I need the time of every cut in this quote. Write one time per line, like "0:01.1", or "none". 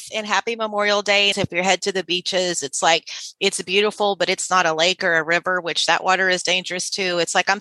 0:01.3